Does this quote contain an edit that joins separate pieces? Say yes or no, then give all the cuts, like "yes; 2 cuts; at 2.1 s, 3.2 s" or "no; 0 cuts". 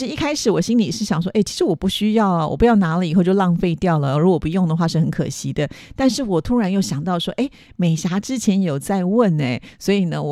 no; 0 cuts